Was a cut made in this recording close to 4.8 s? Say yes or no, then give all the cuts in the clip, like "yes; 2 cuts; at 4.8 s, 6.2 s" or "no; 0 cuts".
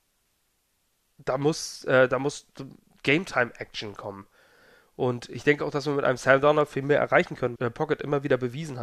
no; 1 cut; at 7.6 s